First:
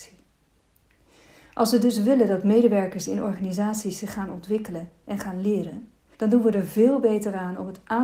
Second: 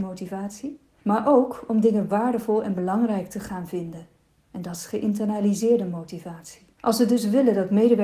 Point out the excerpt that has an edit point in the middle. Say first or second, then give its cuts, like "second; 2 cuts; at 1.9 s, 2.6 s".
second; 1 cut; at 6.8 s